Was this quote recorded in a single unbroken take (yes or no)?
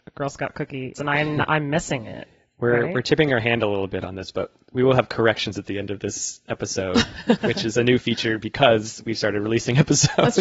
no